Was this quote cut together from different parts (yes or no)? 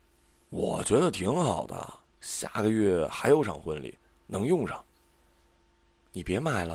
no